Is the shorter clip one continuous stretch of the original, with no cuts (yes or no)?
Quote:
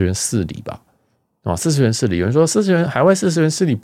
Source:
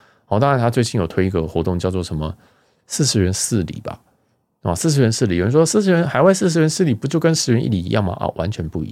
yes